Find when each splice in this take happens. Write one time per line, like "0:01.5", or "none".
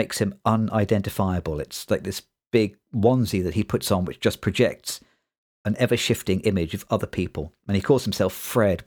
none

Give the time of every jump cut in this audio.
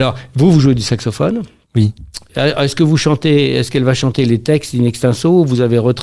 0:02.3

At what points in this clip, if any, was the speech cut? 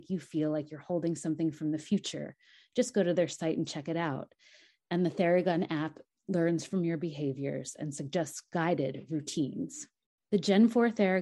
0:10.2

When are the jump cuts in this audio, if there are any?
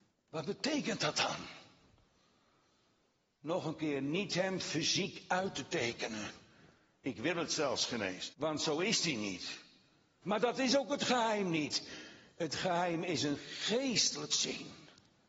0:08.3
0:10.2

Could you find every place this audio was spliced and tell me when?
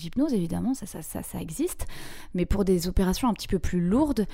none

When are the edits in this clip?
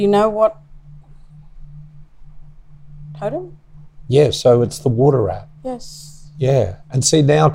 none

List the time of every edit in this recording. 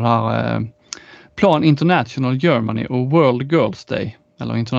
none

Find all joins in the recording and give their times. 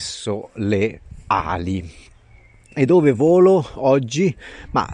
none

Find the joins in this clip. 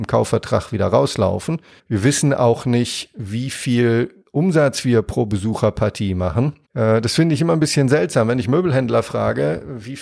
0:01.8
0:06.6

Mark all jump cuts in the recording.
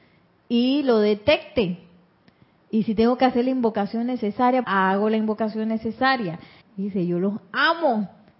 0:04.6
0:06.6

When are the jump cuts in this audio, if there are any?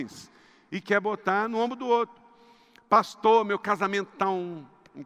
none

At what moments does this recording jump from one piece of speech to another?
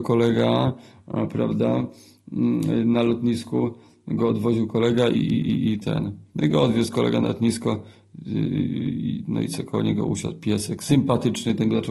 0:05.1
0:06.3

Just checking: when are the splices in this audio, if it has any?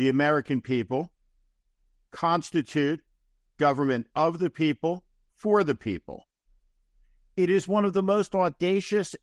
0:05.3

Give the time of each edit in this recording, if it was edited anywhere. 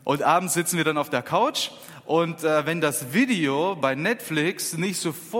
none

